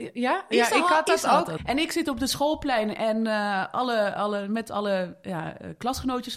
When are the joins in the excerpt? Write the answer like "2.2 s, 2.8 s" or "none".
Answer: 1.6 s